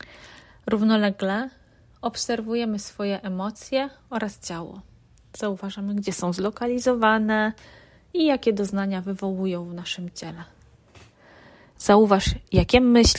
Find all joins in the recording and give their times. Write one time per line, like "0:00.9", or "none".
none